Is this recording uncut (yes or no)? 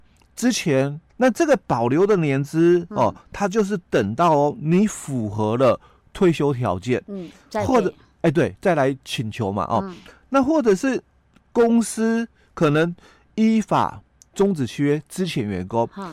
no